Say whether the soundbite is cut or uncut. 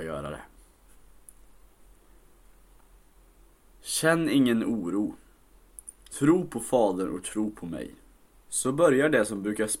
cut